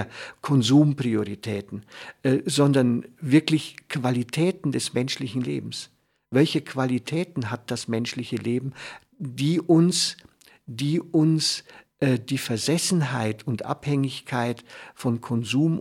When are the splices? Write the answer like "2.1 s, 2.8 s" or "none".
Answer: none